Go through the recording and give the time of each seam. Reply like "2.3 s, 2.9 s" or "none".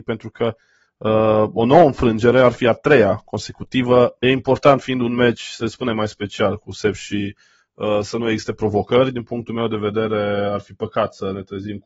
4.2 s